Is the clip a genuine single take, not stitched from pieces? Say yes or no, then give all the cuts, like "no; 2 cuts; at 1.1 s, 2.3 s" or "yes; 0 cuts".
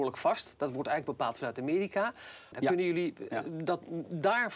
no; 1 cut; at 2.5 s